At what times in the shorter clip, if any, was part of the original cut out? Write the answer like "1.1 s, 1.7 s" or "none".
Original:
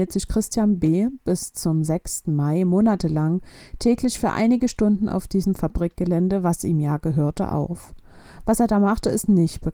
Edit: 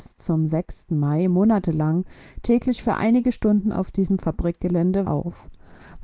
5.0 s